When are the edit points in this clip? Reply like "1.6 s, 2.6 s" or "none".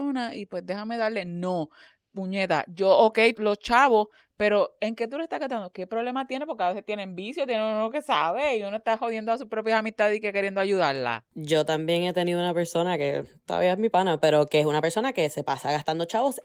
3.3 s

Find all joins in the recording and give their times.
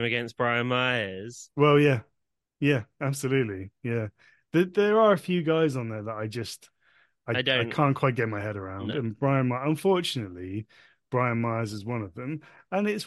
none

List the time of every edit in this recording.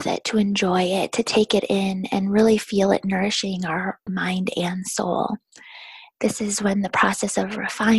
4.1 s, 6.2 s

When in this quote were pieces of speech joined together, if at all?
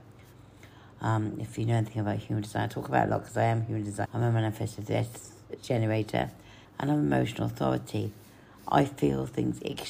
4.1 s, 6.6 s

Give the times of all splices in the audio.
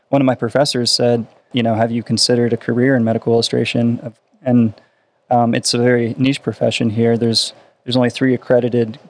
1.5 s

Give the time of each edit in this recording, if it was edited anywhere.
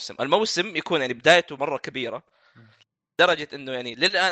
1.6 s

